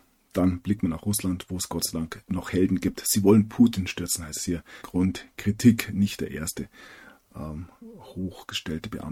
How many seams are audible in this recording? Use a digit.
1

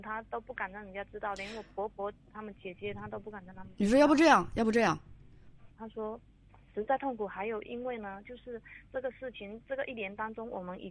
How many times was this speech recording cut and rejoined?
1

